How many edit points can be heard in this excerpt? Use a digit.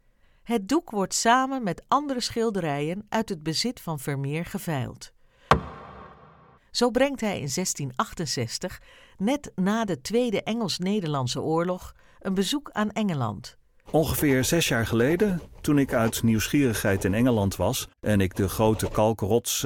3